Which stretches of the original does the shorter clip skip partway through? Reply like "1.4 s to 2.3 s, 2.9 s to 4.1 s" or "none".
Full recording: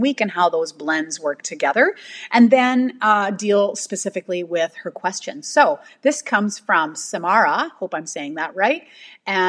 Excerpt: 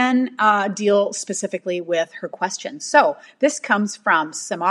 none